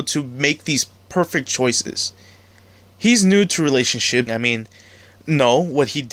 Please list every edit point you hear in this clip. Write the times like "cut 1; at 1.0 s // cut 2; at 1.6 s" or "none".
cut 1; at 4.3 s